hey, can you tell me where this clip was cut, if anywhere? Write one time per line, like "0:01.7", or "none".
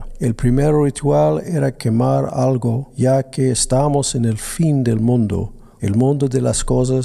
0:05.8